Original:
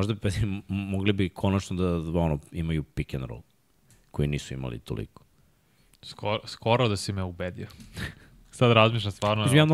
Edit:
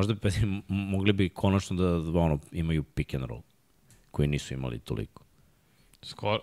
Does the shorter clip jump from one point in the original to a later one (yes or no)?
no